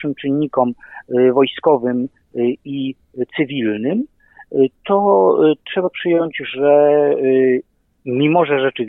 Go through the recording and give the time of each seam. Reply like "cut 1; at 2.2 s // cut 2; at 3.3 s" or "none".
none